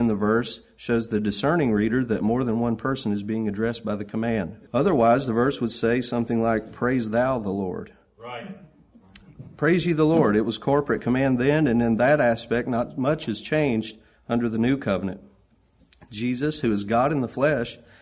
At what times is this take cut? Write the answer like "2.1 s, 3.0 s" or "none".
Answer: 4.7 s